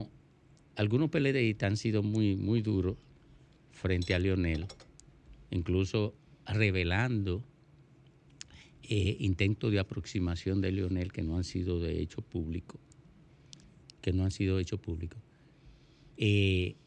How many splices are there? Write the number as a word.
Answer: zero